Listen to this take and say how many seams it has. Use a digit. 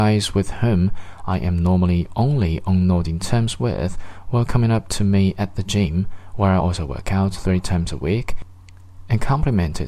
0